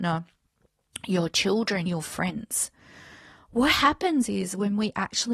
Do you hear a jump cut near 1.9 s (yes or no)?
yes